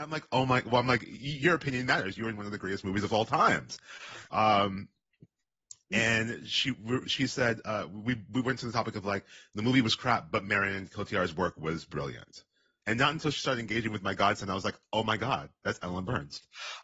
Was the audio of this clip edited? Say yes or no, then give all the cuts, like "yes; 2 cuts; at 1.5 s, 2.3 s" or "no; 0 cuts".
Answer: yes; 2 cuts; at 7.0 s, 12.8 s